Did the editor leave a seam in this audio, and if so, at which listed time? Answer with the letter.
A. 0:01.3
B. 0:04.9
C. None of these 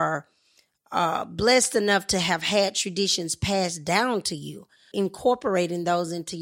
B